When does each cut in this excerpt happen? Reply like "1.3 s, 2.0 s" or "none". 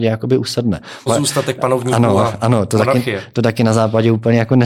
1.1 s